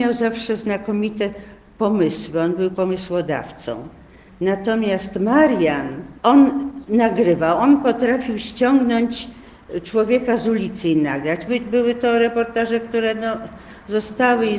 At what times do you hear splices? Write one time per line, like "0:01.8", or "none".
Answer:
0:06.2
0:11.5